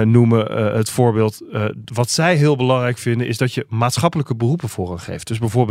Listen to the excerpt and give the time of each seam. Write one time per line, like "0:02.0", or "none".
none